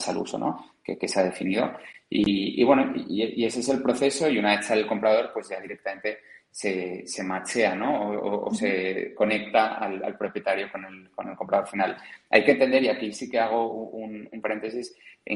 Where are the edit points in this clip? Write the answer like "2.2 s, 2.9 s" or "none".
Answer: none